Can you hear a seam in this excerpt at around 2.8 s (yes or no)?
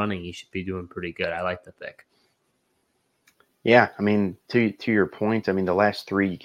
no